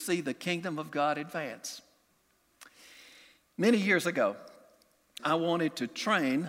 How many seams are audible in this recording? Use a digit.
1